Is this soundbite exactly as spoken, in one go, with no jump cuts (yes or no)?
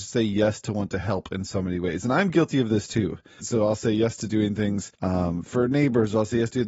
no